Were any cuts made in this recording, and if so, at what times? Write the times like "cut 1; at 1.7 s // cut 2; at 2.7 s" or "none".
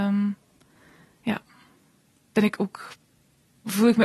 none